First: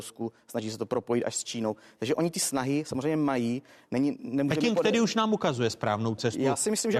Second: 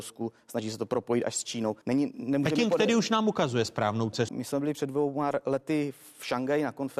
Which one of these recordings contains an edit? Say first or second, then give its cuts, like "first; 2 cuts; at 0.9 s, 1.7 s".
second; 2 cuts; at 1.8 s, 4.3 s